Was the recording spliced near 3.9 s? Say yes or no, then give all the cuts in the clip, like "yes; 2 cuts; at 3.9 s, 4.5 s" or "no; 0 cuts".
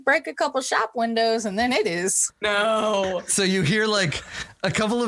no; 1 cut; at 2.3 s